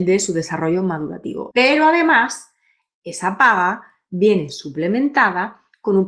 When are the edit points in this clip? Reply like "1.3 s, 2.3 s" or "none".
1.5 s